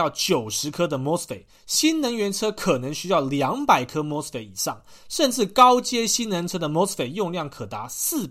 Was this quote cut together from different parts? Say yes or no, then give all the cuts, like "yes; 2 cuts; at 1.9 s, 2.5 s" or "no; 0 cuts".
no; 0 cuts